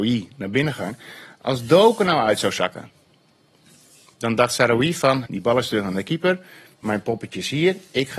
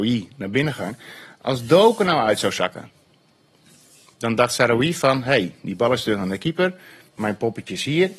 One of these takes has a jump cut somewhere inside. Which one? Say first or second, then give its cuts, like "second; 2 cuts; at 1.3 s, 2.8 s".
first; 1 cut; at 5.3 s